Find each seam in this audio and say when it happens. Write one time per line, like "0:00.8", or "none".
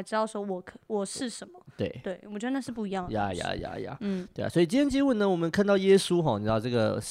none